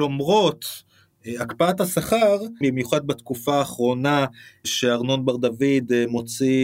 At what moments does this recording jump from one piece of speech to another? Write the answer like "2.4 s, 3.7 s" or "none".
2.6 s